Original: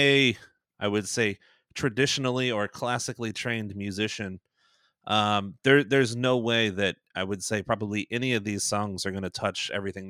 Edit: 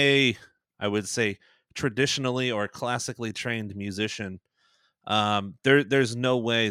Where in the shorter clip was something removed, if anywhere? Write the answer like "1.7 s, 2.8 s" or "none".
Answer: none